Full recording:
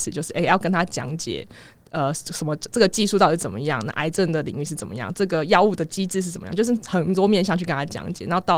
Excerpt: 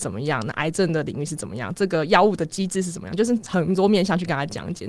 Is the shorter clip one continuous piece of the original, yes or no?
yes